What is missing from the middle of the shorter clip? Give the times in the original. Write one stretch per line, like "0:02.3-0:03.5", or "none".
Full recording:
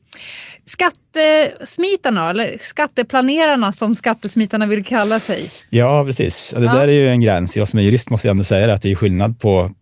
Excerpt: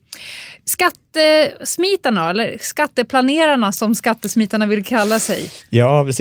none